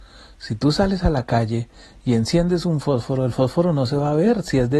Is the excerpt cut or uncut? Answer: uncut